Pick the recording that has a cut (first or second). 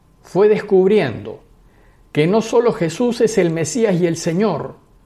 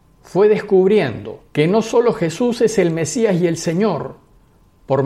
second